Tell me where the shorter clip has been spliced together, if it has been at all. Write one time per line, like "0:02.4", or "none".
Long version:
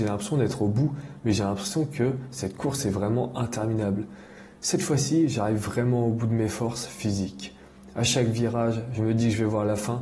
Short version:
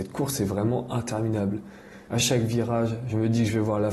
0:02.1